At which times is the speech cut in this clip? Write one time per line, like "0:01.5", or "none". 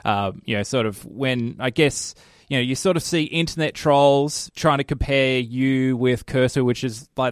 0:04.5

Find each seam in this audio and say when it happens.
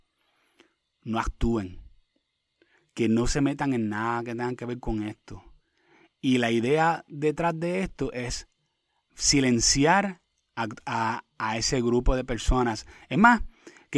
none

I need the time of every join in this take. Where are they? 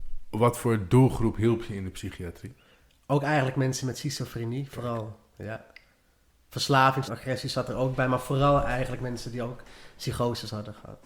0:07.1

